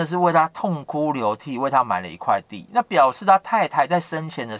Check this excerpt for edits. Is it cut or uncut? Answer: uncut